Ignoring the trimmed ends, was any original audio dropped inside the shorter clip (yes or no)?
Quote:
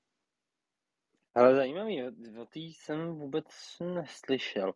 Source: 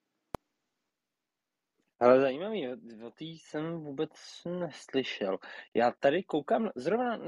no